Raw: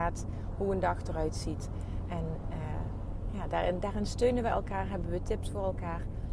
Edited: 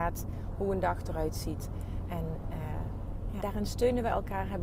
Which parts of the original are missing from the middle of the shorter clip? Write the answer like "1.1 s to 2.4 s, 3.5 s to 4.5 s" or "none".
3.4 s to 3.8 s